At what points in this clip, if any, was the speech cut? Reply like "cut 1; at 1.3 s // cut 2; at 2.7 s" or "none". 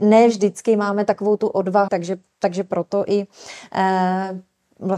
cut 1; at 1.9 s